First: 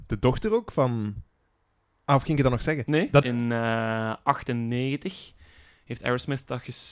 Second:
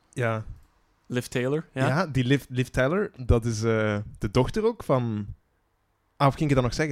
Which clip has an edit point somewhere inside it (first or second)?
first